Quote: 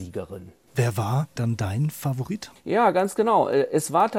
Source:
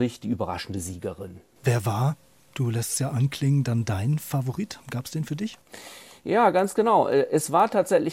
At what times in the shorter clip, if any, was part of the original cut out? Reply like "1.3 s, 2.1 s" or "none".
1.4 s, 2.6 s